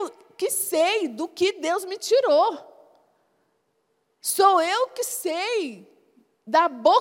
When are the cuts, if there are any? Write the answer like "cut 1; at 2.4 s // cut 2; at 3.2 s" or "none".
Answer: none